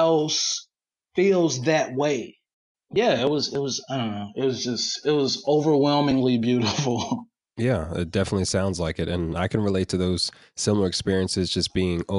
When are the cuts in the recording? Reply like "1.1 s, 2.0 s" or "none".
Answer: none